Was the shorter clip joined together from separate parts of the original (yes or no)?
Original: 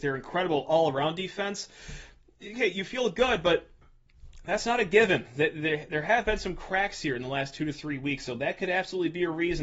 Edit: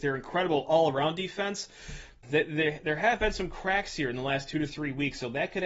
yes